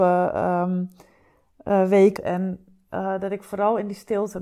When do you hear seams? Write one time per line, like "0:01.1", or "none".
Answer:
0:02.2